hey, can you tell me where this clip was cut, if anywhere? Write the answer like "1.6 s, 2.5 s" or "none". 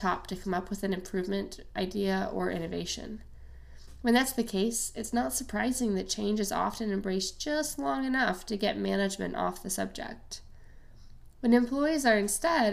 none